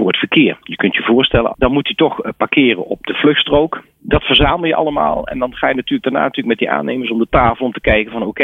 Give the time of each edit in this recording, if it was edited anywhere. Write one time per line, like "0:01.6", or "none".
0:01.5
0:03.8